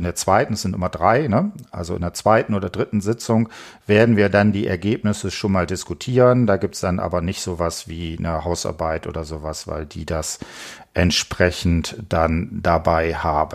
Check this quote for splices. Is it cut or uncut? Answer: uncut